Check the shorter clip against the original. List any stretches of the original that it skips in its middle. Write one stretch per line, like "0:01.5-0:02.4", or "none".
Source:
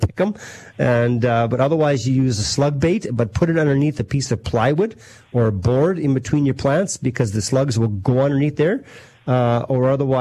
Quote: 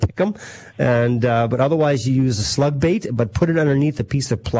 none